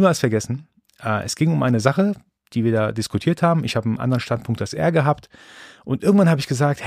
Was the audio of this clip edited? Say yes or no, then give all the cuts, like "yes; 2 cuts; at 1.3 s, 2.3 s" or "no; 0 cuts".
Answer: no; 0 cuts